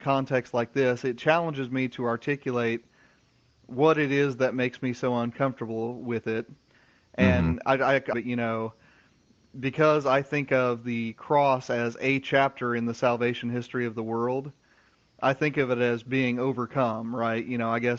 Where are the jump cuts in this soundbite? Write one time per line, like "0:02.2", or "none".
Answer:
0:08.1